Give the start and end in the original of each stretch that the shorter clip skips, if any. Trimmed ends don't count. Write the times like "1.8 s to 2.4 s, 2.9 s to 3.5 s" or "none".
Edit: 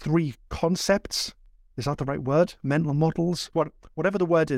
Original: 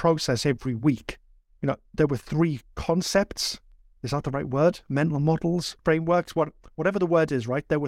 5.8 s to 6.3 s